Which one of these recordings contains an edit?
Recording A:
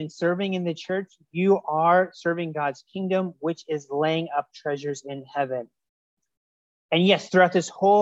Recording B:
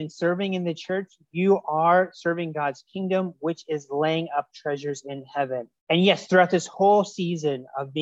B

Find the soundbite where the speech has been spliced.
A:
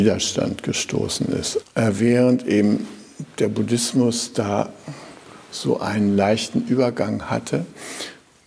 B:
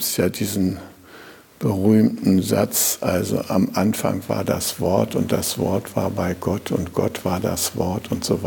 A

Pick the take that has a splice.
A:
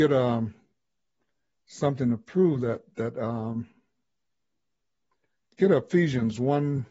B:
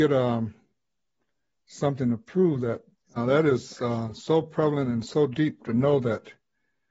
B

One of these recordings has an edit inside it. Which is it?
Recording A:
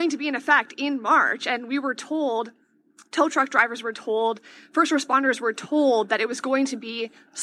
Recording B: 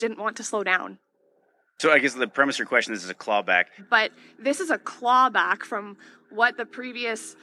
B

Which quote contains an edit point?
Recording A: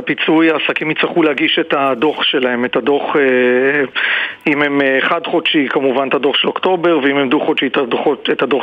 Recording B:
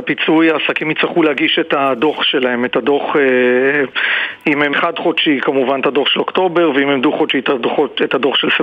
B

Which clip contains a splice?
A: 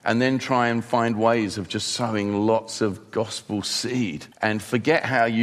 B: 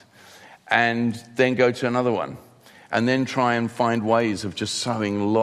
A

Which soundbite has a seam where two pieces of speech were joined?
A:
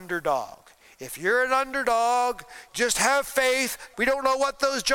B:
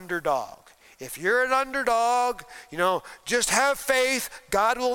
A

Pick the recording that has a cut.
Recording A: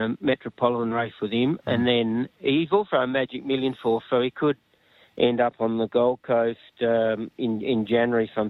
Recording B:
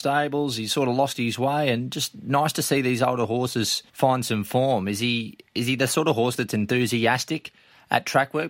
B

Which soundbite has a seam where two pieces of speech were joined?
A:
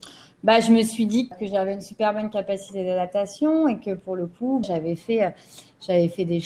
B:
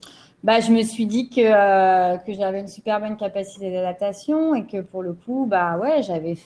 A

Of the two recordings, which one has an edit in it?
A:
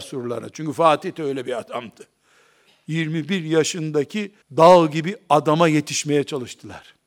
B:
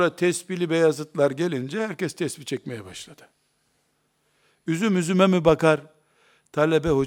A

